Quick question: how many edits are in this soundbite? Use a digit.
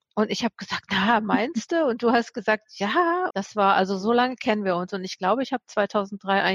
1